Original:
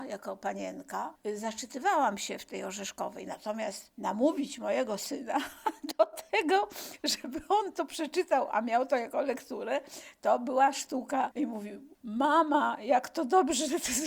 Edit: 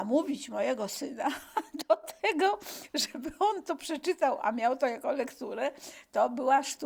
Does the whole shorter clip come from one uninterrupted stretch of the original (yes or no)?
yes